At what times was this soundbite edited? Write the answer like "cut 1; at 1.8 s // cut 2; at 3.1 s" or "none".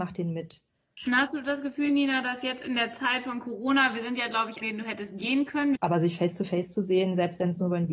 cut 1; at 1.0 s // cut 2; at 4.6 s // cut 3; at 5.8 s